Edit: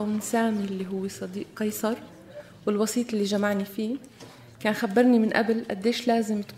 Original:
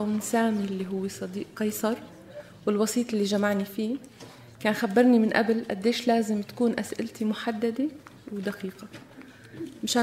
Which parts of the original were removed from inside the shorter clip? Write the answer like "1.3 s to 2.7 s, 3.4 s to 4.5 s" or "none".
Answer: none